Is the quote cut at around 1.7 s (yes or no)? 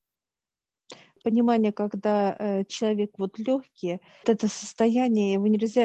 no